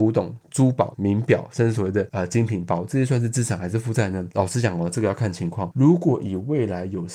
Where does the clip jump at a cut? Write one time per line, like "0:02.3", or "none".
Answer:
none